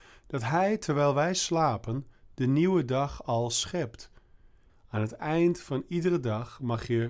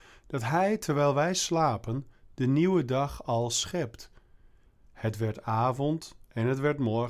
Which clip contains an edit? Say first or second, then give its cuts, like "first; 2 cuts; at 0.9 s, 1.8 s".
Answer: first; 1 cut; at 4.7 s